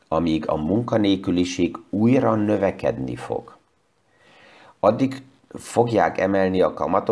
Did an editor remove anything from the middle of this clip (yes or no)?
no